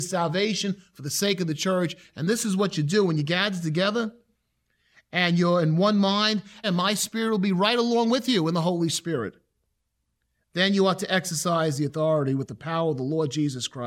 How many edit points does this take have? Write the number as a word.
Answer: one